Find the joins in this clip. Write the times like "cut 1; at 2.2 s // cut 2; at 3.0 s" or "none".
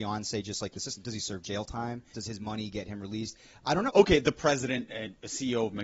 cut 1; at 2.1 s // cut 2; at 3.9 s